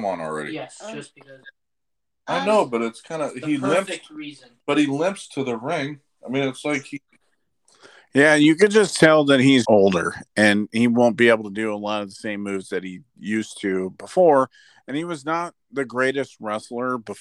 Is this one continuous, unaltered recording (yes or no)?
no